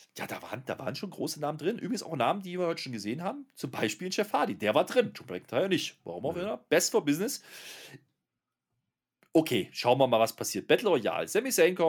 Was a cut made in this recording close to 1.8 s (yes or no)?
no